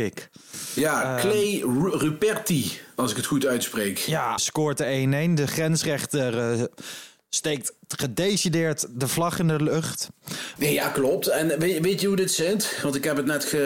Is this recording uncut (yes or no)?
no